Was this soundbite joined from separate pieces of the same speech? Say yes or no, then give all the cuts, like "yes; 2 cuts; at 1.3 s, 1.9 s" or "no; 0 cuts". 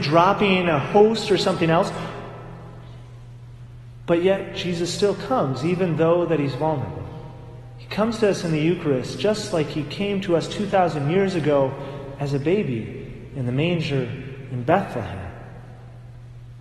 no; 0 cuts